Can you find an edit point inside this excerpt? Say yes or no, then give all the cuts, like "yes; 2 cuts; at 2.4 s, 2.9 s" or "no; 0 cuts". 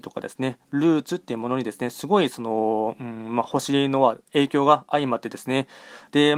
no; 0 cuts